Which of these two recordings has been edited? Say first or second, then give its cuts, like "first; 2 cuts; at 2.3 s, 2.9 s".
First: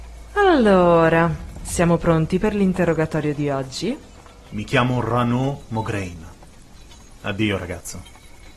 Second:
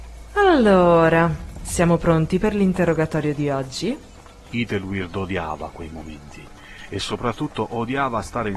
first; 1 cut; at 4.5 s